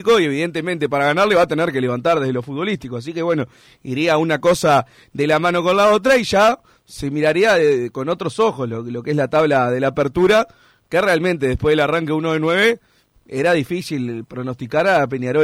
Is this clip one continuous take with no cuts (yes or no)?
yes